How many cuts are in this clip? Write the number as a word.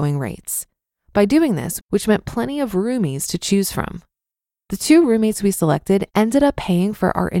one